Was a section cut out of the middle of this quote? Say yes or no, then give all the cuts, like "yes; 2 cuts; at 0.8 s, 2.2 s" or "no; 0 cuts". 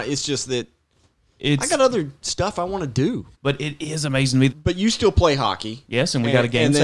yes; 2 cuts; at 3.3 s, 4.5 s